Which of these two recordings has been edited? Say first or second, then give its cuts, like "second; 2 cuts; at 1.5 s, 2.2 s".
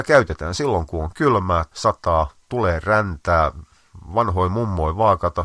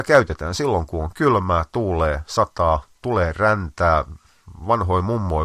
first; 1 cut; at 1.7 s